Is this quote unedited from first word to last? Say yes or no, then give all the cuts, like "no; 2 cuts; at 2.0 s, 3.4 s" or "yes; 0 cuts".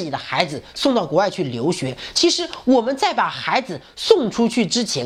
yes; 0 cuts